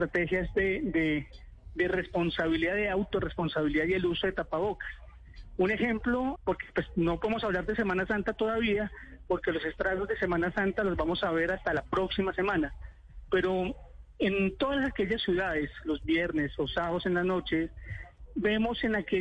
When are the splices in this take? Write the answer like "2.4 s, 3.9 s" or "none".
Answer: 6.4 s, 18.3 s